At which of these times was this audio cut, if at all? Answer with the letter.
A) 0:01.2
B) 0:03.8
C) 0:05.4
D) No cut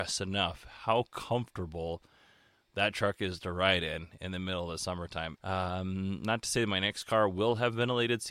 C